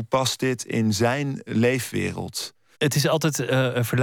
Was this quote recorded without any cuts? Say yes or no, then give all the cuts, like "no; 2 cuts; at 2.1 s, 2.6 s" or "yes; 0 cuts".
no; 2 cuts; at 1.5 s, 2.7 s